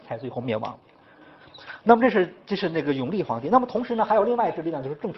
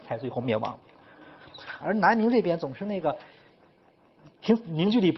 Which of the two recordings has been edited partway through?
second; 1 cut; at 1.8 s

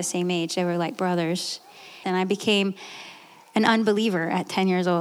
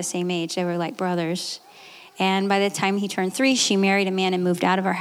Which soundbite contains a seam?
first; 1 cut; at 2.0 s

